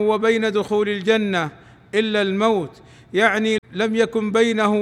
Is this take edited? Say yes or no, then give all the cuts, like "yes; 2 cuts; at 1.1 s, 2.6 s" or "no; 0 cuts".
yes; 1 cut; at 3.6 s